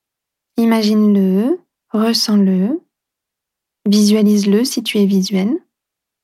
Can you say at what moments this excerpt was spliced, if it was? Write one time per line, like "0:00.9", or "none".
none